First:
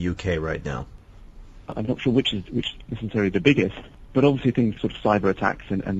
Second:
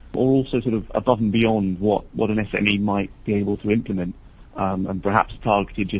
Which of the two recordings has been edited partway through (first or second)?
first